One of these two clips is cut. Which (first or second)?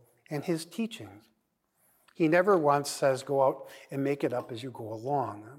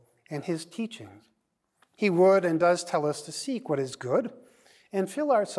second